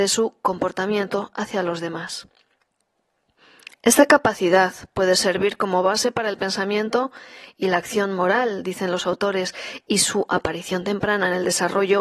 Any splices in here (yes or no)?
no